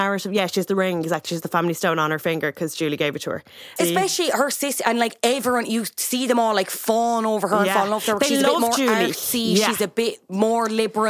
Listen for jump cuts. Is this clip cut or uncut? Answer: cut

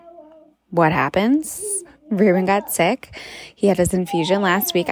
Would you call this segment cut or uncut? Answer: cut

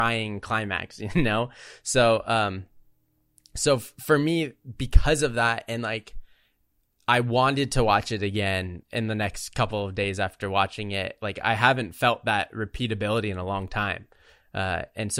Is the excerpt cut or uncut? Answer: cut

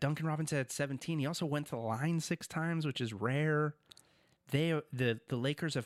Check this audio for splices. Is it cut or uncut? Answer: uncut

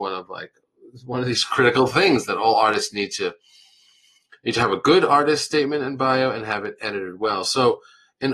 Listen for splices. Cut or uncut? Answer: uncut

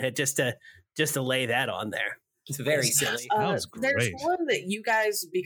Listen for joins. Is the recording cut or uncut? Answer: uncut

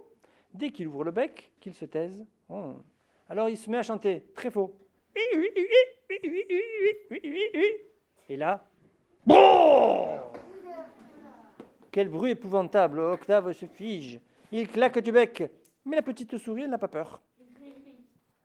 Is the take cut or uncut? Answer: cut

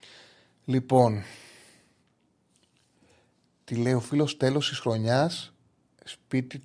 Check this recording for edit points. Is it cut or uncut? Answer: uncut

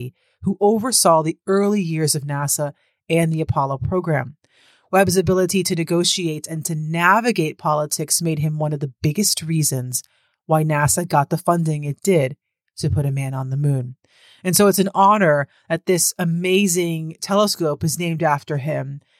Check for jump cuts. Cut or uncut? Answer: uncut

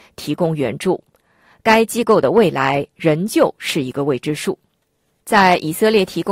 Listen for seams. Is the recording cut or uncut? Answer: uncut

